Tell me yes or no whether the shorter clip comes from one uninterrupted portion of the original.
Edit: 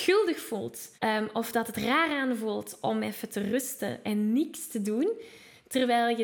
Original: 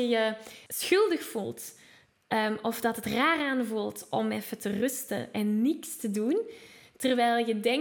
no